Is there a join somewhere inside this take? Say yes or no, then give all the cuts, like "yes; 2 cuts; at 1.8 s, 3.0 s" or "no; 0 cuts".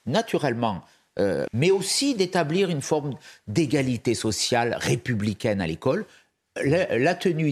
yes; 1 cut; at 1.5 s